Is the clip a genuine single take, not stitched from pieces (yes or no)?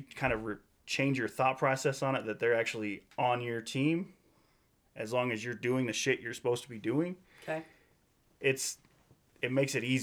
yes